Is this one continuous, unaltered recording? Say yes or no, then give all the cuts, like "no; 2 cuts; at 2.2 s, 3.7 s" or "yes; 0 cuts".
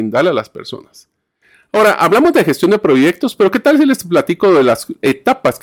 yes; 0 cuts